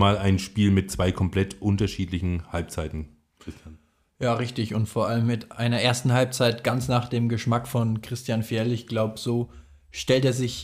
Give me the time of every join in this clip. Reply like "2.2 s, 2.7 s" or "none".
none